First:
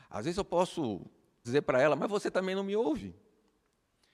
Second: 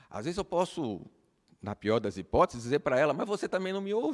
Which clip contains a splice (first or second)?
first